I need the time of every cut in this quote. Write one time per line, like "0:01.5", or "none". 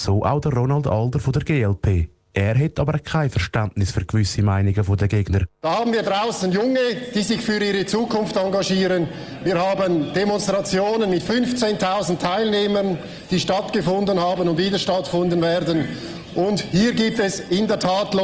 none